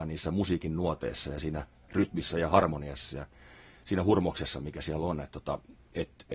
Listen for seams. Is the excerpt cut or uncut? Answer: uncut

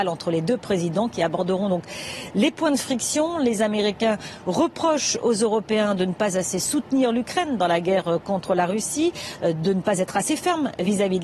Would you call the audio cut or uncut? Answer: uncut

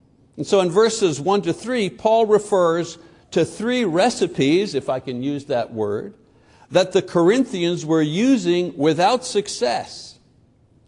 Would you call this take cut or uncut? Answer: uncut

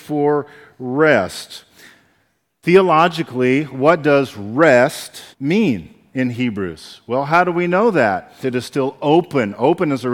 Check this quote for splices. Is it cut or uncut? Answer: cut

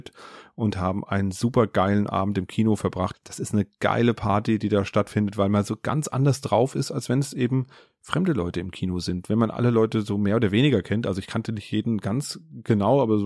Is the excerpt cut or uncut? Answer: cut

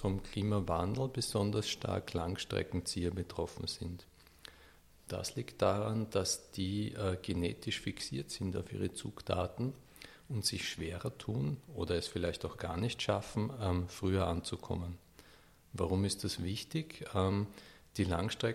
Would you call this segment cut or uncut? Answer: uncut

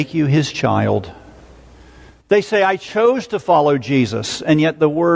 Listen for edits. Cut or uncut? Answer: cut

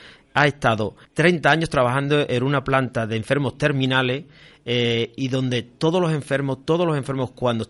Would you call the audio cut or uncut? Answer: cut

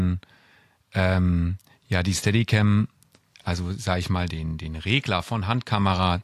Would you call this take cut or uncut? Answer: cut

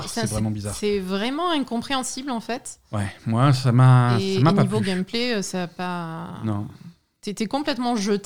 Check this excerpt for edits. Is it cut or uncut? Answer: uncut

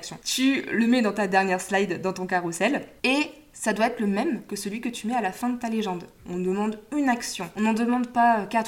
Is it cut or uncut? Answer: cut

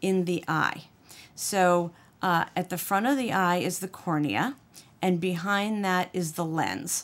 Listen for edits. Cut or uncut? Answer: uncut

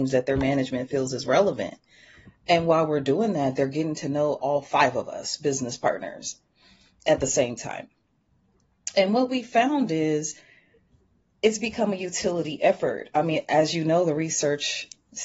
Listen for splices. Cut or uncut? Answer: uncut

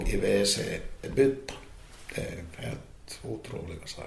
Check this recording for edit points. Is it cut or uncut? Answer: uncut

